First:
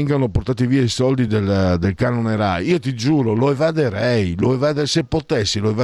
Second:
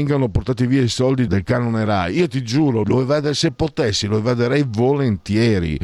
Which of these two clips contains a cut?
second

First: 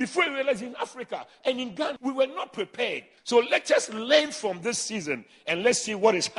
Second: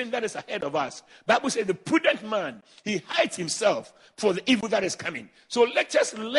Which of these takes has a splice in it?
first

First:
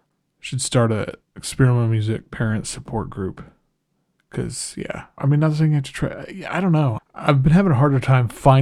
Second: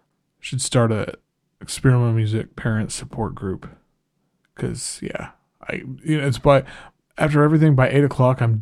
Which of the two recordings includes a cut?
first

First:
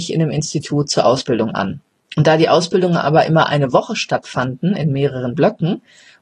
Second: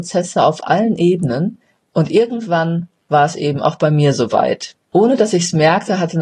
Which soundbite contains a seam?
second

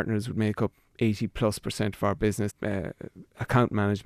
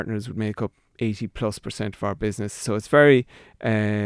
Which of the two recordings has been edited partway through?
first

